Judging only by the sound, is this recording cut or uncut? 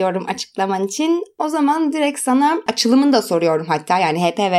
uncut